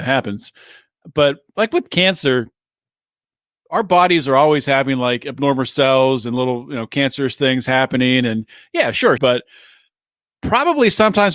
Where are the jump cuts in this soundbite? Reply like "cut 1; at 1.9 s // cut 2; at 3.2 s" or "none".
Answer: cut 1; at 9.2 s